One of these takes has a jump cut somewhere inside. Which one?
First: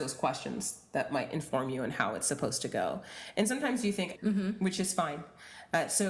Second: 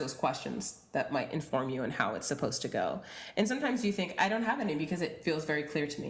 first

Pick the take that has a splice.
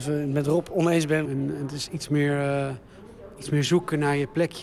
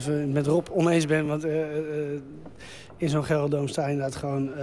first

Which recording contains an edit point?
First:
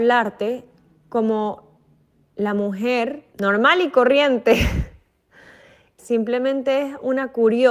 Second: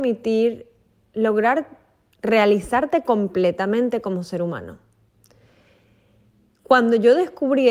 first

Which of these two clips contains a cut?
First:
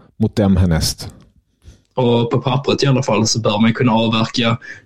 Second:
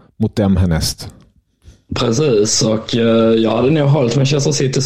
first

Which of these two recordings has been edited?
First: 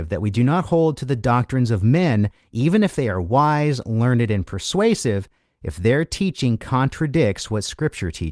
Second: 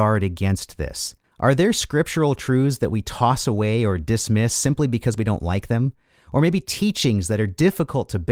second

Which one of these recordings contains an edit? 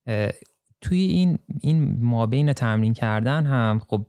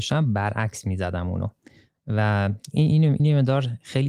second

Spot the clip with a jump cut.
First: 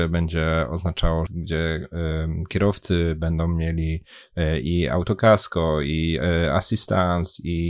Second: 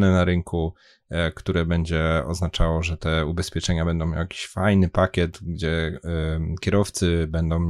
first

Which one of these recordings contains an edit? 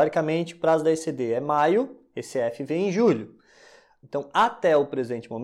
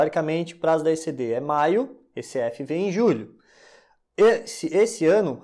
first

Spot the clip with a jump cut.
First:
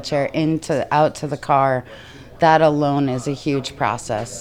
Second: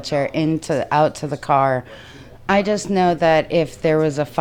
second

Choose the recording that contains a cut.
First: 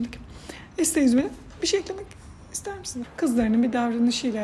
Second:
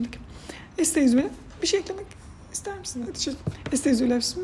first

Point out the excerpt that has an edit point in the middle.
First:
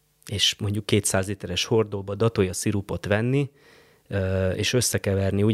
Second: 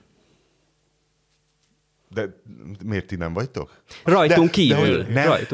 second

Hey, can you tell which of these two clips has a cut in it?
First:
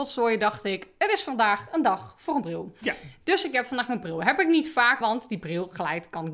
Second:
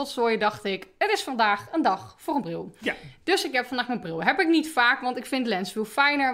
first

